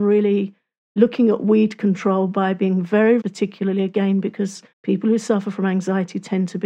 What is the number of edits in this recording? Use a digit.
2